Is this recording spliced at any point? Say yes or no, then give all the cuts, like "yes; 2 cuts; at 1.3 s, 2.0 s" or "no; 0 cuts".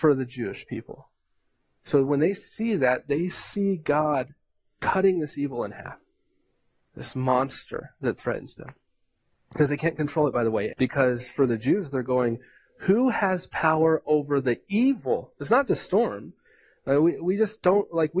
yes; 2 cuts; at 10.7 s, 15.7 s